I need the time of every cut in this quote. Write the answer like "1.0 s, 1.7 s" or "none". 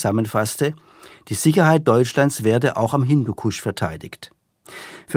none